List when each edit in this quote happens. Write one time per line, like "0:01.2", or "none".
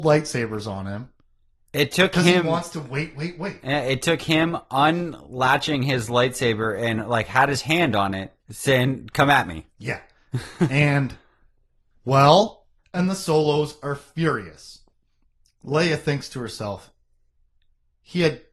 0:08.4
0:12.8